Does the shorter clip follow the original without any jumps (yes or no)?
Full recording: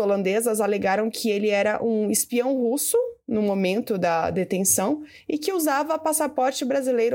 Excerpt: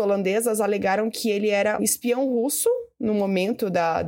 no